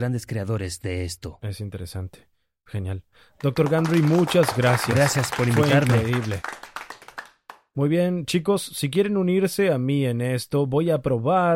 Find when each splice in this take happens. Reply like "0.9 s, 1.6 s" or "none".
none